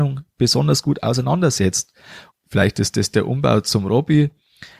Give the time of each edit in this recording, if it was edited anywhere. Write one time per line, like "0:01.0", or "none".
0:02.3